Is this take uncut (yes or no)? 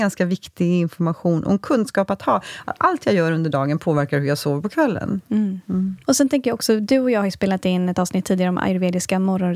no